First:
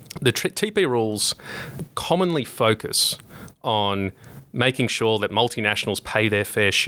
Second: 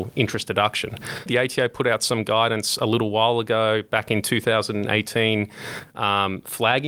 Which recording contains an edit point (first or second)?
second